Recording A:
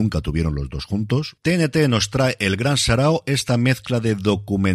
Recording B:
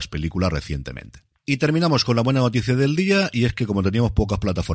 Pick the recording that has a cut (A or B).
B